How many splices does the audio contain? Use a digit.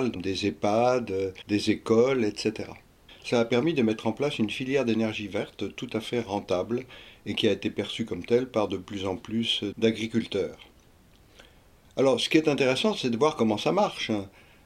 1